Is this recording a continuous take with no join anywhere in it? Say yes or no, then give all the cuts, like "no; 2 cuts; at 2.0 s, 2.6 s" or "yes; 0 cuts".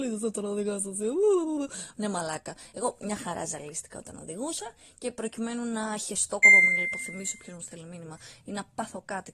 no; 1 cut; at 6.4 s